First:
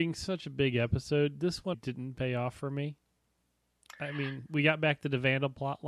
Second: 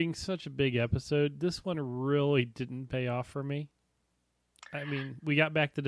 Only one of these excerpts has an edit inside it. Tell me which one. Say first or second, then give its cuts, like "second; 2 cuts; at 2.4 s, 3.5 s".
first; 1 cut; at 1.7 s